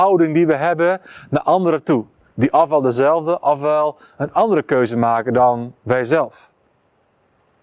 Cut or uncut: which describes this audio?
uncut